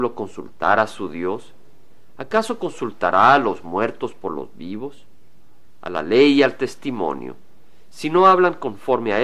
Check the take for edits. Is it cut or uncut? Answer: uncut